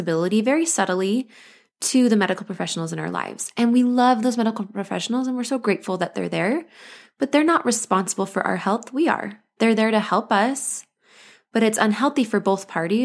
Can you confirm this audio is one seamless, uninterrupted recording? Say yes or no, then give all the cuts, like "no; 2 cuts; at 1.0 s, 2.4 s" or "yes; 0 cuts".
yes; 0 cuts